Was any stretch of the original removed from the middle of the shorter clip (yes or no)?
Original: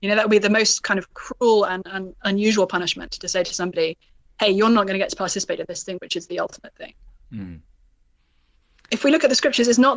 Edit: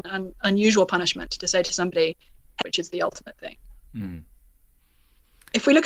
yes